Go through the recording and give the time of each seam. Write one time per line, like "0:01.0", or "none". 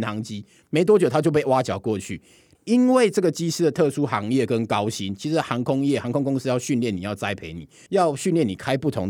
0:02.5
0:07.9